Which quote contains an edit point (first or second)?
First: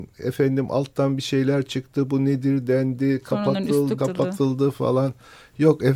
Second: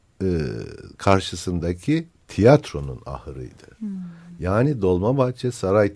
first